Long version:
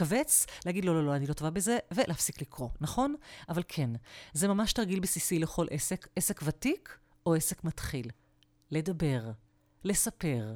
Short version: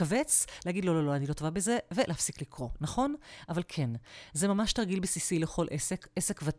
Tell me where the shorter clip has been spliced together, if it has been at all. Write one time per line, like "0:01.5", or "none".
none